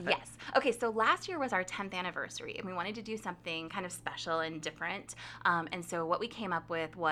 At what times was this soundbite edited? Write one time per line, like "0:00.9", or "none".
none